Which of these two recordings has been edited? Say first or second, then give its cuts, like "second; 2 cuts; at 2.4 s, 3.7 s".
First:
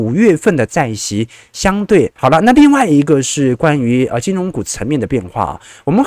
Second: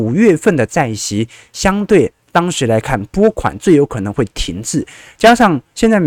first; 1 cut; at 2.2 s